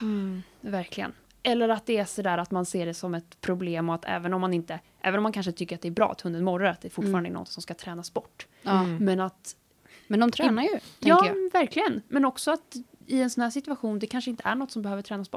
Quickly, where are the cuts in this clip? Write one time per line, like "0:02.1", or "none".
none